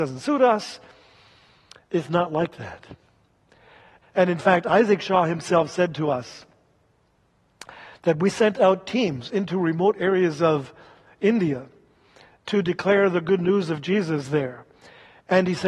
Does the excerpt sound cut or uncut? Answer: cut